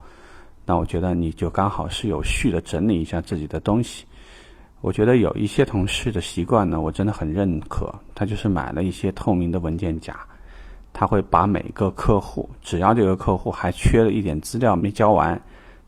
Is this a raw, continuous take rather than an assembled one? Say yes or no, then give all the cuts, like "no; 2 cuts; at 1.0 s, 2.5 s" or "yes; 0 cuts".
no; 1 cut; at 14.8 s